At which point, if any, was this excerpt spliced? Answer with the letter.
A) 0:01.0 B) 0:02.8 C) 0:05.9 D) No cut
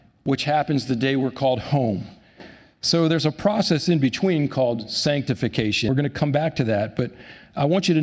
C